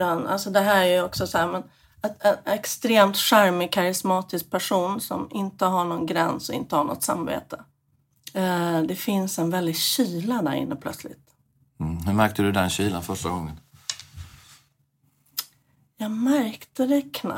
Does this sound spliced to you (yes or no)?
no